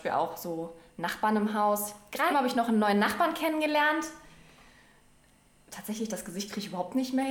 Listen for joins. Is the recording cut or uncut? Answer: cut